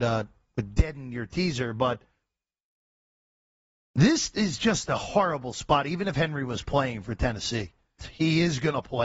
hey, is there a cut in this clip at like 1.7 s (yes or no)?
no